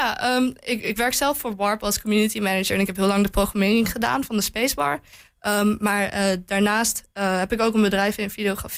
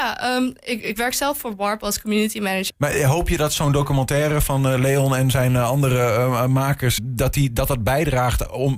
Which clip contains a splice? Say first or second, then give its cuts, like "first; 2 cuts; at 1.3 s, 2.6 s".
second; 2 cuts; at 2.7 s, 7.0 s